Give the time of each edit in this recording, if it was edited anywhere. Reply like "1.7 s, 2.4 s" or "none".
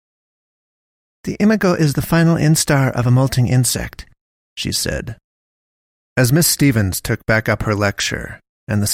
1.1 s